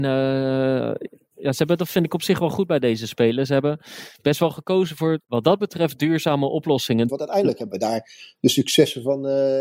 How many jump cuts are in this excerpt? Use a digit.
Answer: 2